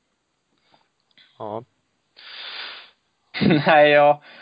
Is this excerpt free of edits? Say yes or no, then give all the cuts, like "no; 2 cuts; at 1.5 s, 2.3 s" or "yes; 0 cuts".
no; 1 cut; at 3.3 s